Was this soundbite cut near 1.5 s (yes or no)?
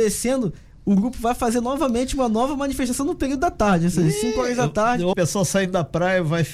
no